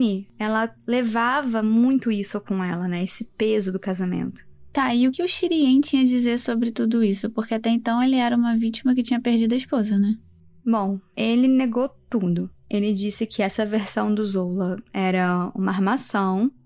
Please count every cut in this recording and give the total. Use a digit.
1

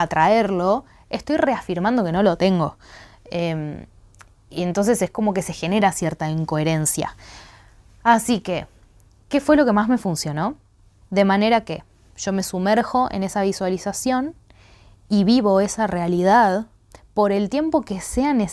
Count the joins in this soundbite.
1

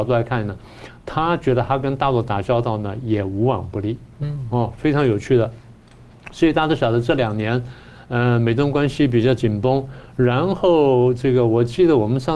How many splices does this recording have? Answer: 0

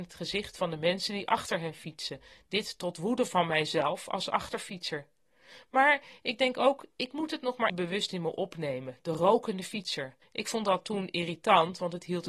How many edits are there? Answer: 2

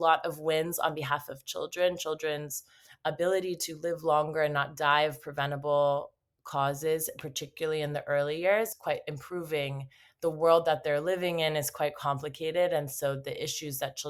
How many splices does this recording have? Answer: 1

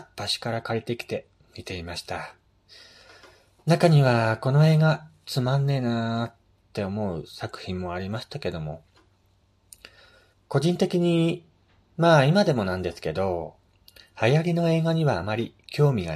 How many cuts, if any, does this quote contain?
1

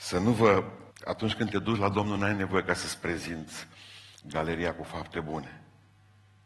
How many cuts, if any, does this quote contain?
1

